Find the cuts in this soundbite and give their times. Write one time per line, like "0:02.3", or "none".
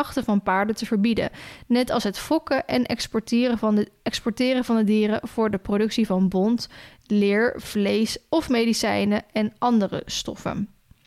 none